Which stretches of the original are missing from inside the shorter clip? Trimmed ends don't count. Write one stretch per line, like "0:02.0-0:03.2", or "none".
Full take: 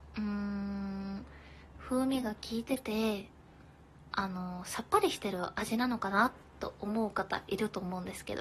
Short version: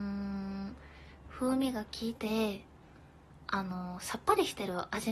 0:02.6-0:02.8